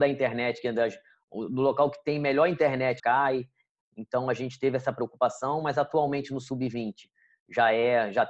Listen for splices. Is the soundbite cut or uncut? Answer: cut